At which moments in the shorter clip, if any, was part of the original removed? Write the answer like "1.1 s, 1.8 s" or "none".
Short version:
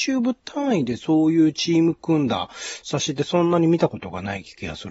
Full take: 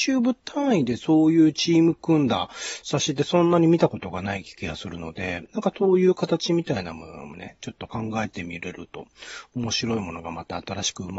none